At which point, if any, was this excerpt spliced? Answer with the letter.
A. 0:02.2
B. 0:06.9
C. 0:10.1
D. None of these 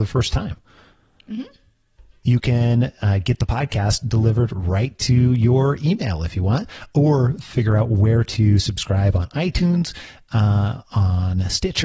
A